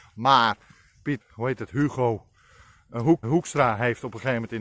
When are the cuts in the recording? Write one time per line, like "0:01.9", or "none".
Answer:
0:01.2
0:03.2